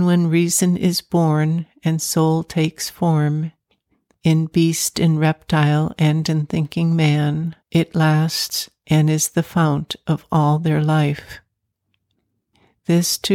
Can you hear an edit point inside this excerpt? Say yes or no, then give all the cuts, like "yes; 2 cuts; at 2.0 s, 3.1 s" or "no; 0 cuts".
yes; 1 cut; at 7.6 s